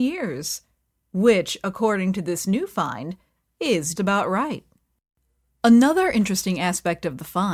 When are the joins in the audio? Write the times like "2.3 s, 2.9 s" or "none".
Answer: 4.0 s